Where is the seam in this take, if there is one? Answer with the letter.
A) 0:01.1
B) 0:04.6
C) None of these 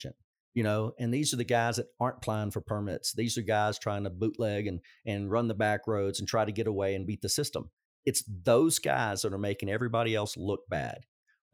C